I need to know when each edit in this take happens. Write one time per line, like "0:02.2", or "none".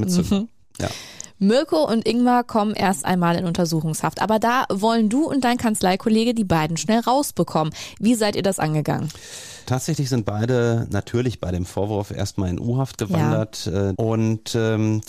0:13.9